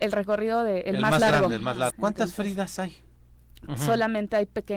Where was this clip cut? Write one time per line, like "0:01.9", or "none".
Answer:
0:01.9
0:03.7